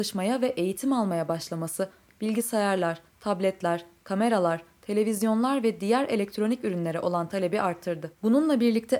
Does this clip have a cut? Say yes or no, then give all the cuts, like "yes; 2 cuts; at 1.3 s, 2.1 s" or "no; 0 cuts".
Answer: no; 0 cuts